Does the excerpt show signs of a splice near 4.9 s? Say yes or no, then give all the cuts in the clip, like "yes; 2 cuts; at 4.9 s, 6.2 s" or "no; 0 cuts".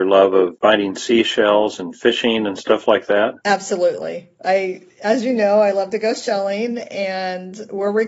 no; 0 cuts